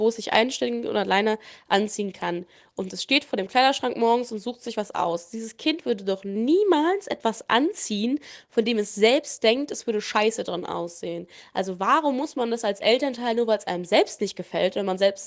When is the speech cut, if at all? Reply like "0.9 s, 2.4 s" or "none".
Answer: none